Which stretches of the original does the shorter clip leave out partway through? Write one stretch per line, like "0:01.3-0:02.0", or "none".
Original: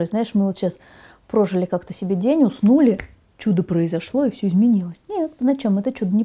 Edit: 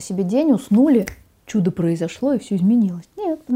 none